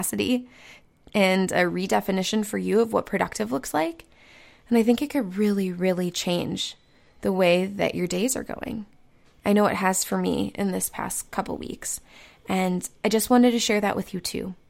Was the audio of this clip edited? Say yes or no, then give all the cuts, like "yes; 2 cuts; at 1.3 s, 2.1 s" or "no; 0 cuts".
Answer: no; 0 cuts